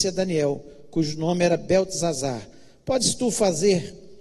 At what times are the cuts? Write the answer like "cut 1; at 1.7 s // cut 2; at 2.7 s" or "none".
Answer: none